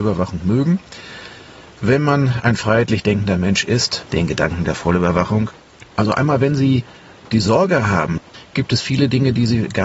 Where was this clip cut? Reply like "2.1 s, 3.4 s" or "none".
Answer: 4.0 s, 5.9 s

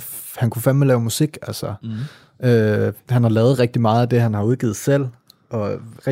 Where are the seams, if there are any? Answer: none

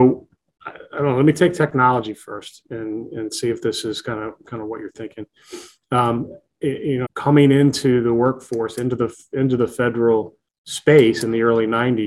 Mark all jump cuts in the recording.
7.0 s

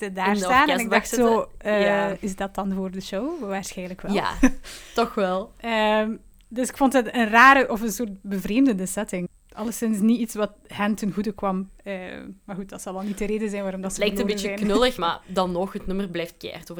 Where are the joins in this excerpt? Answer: none

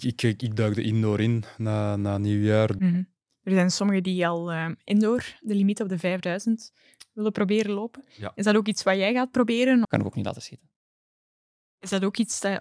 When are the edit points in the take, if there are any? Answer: 2.8 s, 9.8 s

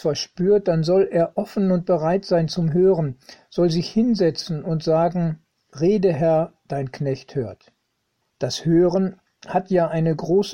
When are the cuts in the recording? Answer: 8.2 s

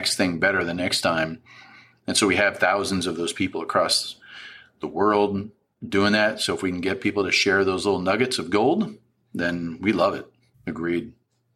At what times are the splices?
10.5 s

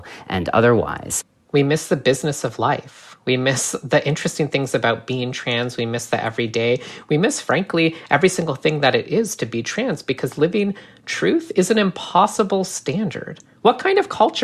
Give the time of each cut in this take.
1.5 s

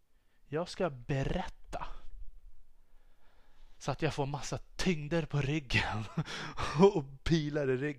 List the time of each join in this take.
none

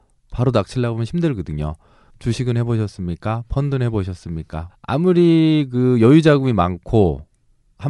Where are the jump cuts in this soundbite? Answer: 2.1 s, 4.7 s

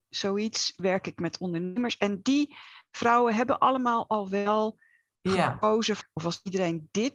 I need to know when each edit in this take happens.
6.0 s

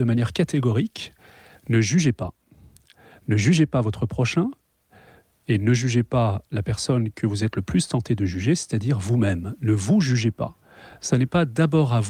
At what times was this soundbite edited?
none

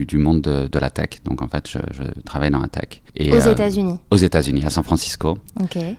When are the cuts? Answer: 3.1 s

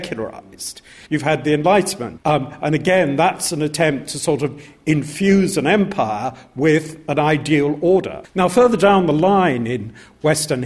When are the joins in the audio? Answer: 1.0 s, 2.2 s, 8.2 s

